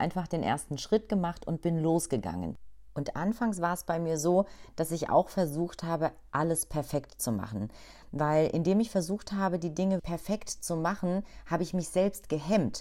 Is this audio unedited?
no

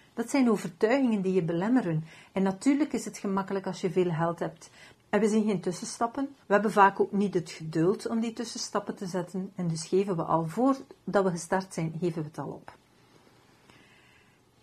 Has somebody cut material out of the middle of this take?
yes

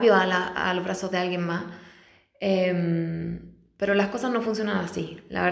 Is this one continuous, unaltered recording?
yes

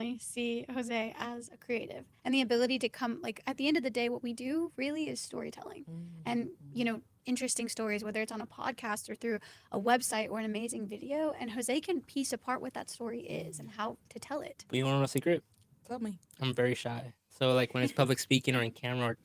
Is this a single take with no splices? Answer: no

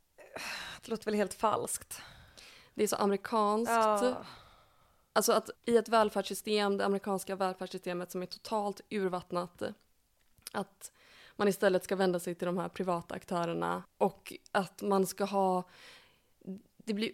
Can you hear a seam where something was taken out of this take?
yes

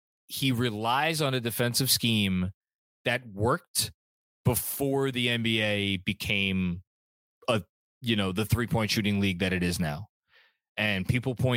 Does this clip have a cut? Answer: no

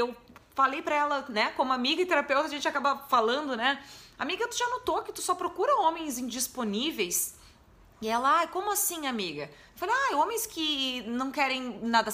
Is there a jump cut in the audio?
no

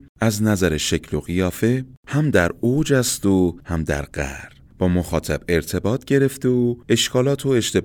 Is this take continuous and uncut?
no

